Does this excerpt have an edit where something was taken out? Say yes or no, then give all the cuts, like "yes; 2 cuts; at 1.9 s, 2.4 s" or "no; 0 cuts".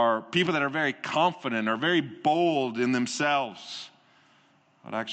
no; 0 cuts